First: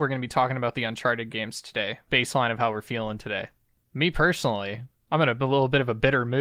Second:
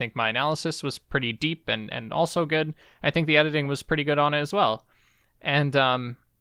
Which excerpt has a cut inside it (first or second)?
first